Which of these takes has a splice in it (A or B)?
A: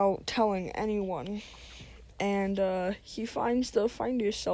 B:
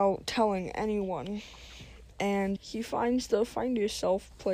B